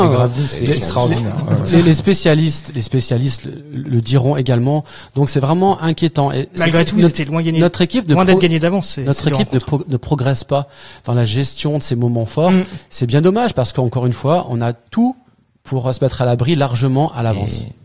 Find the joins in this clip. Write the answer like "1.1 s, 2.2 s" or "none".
none